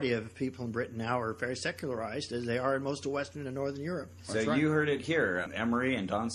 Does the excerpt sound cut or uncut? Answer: uncut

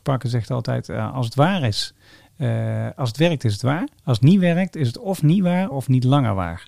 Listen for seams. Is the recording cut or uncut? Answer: cut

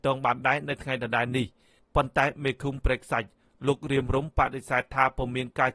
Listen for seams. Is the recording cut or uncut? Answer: uncut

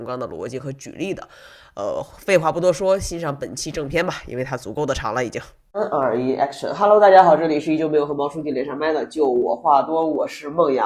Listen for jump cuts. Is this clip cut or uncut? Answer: uncut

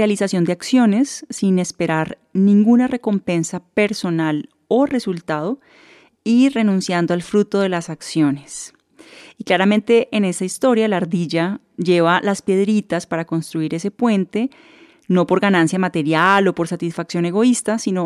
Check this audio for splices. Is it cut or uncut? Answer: uncut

